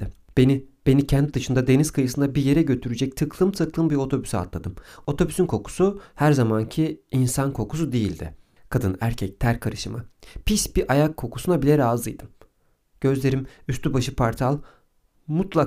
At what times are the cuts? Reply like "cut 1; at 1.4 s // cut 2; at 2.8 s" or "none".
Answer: none